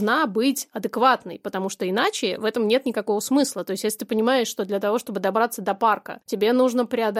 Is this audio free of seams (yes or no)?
yes